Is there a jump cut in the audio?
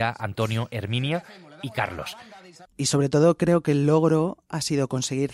yes; 1 cut; at 2.6 s

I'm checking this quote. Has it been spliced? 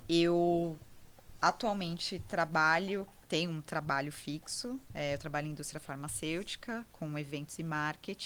yes; 1 cut; at 3.2 s

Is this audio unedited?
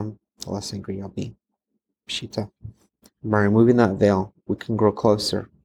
no; 1 cut; at 3.1 s

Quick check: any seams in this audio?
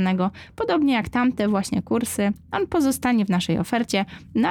no; 0 cuts

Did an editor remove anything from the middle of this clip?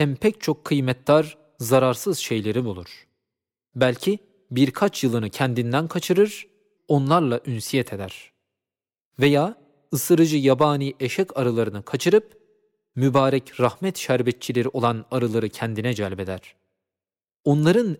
yes; 1 cut; at 6.8 s

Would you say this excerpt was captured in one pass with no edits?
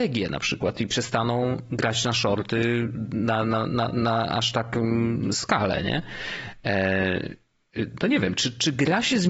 yes; 0 cuts

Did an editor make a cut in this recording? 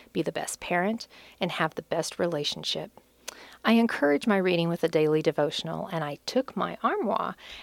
no; 0 cuts

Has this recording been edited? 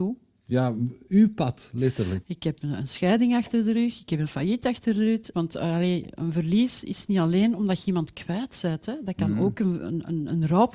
yes; 2 cuts; at 2.2 s, 5.3 s

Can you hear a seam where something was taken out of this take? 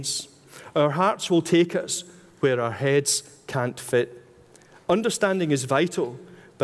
no; 0 cuts

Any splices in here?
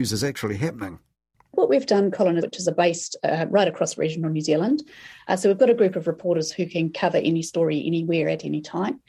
yes; 1 cut; at 2.4 s

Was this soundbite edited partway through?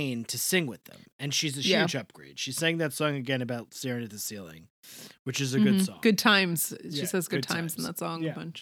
no; 0 cuts

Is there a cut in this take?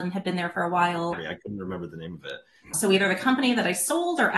yes; 2 cuts; at 1.1 s, 2.7 s

